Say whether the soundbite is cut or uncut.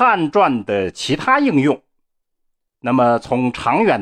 cut